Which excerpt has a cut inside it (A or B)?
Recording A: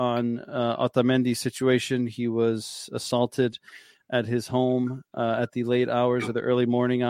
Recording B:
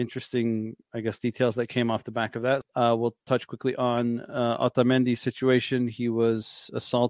B